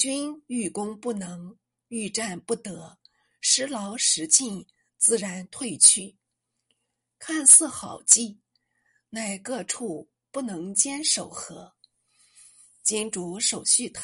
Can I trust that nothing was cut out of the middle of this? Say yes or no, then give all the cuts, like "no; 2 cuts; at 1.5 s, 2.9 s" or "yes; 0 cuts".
yes; 0 cuts